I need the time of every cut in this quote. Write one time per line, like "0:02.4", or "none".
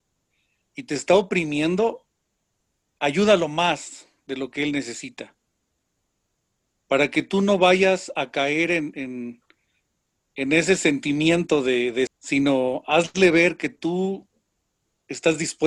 0:12.1